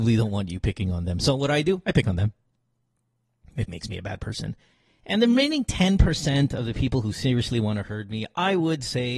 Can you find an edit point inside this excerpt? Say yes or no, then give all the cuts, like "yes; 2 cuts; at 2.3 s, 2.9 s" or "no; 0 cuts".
yes; 1 cut; at 3.7 s